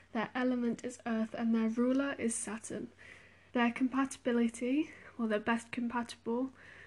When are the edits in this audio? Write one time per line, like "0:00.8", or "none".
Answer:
0:03.5